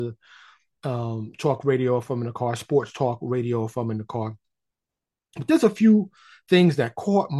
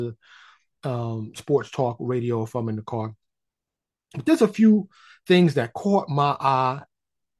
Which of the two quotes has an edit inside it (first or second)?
second